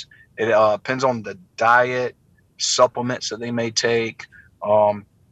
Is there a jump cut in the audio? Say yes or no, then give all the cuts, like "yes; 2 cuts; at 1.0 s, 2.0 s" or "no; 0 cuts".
no; 0 cuts